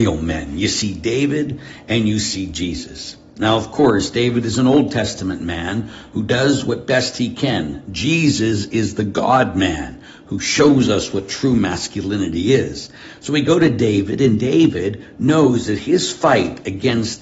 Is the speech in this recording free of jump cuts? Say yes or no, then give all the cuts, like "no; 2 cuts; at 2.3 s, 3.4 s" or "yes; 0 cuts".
yes; 0 cuts